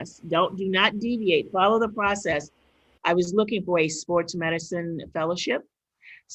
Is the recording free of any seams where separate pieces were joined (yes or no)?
no